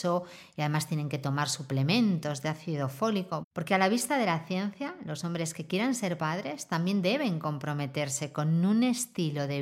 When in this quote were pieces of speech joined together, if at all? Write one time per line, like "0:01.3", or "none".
0:03.4

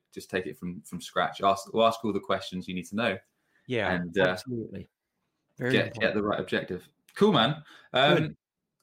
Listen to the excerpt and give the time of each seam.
none

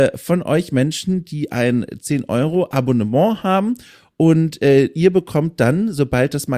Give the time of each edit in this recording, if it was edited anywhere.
none

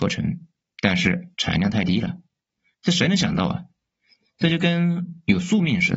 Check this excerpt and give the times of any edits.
0:02.7

